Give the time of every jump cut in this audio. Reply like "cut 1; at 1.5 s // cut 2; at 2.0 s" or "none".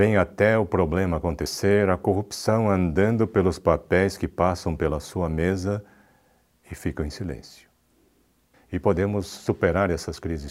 cut 1; at 8.5 s

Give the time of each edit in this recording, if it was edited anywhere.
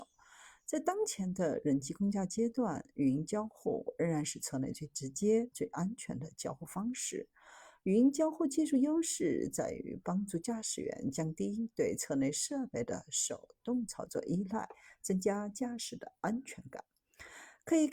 cut 1; at 5.5 s

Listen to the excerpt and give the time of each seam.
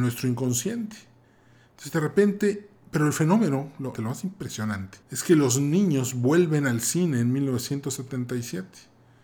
cut 1; at 3.9 s // cut 2; at 5.0 s

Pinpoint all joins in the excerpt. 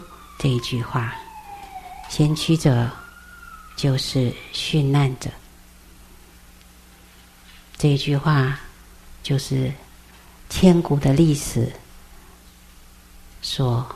none

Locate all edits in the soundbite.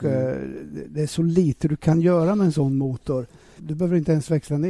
cut 1; at 3.6 s

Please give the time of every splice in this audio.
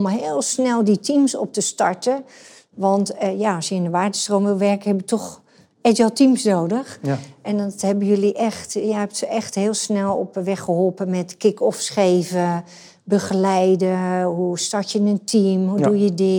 none

